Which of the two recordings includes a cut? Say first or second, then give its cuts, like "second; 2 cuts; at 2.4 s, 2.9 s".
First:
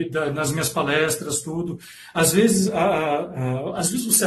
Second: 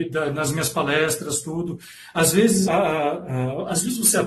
second; 1 cut; at 2.7 s